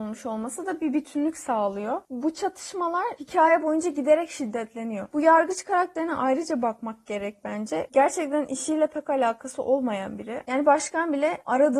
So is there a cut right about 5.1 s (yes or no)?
yes